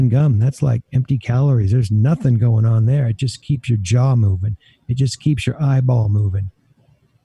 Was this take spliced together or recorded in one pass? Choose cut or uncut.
uncut